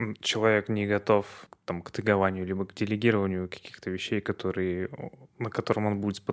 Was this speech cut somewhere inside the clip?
no; 0 cuts

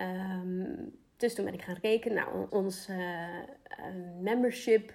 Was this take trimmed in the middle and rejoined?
yes; 1 cut; at 2.5 s

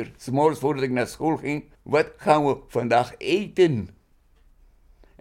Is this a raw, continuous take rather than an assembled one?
no; 1 cut; at 1.7 s

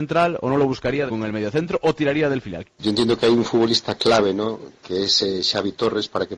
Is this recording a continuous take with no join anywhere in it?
no; 2 cuts; at 1.1 s, 2.6 s

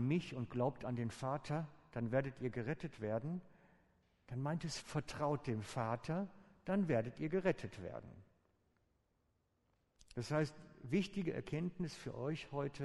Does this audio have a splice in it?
yes; 1 cut; at 4.8 s

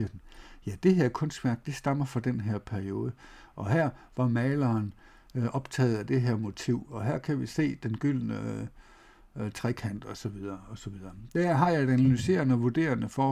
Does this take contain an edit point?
no; 0 cuts

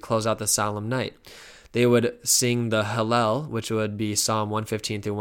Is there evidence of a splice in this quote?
no; 0 cuts

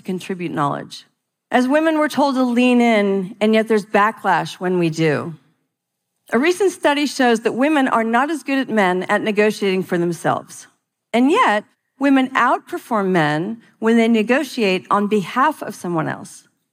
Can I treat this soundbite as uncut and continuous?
yes; 0 cuts

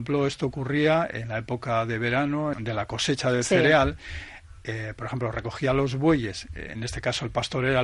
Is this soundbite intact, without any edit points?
no; 1 cut; at 2.5 s

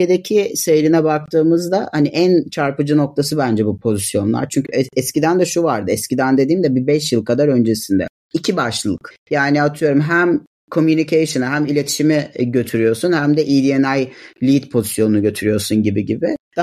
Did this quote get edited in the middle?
no; 0 cuts

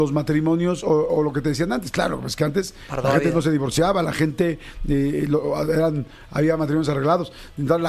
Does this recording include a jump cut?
no; 0 cuts

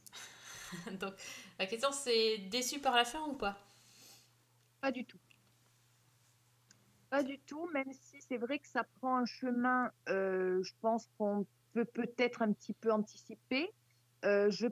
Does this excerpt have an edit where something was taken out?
no; 0 cuts

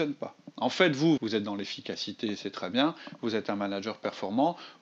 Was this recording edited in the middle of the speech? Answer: yes; 1 cut; at 1.2 s

